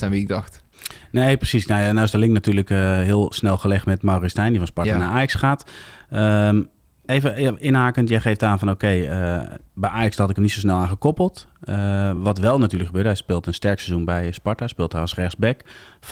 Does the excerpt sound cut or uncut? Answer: uncut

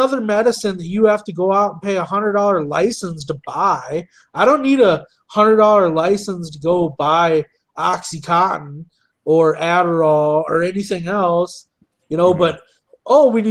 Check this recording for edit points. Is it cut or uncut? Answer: uncut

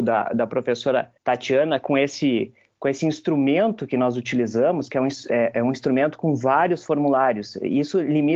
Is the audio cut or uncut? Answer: cut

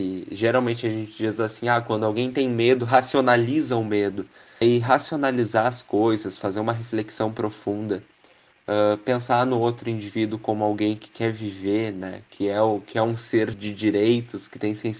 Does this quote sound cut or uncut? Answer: cut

